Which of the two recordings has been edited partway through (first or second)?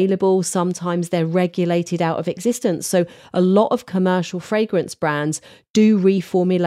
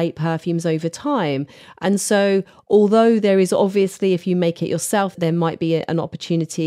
second